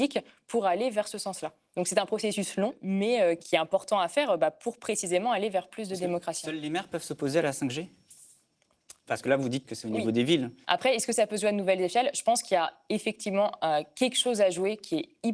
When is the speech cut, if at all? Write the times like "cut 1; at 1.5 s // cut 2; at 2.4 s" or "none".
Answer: cut 1; at 10.6 s